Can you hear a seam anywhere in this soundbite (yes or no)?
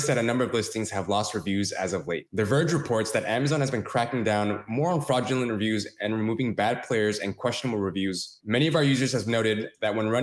yes